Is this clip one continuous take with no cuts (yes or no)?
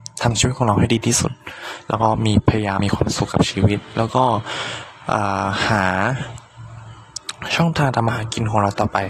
no